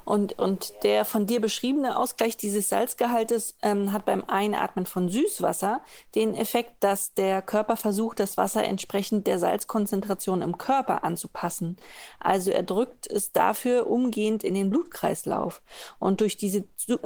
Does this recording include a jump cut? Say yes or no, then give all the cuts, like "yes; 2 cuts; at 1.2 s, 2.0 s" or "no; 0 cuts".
no; 0 cuts